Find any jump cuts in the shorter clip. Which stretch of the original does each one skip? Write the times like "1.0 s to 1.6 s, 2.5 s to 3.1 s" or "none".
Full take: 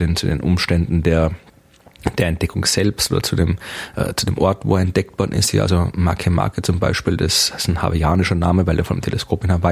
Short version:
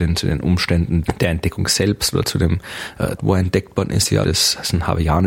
1.0 s to 2.0 s, 4.1 s to 4.6 s, 5.6 s to 7.2 s